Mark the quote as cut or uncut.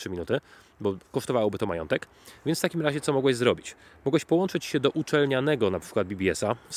uncut